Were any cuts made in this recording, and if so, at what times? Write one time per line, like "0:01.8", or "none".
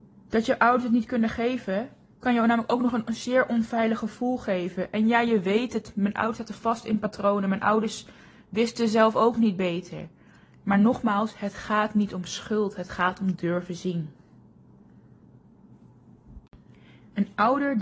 none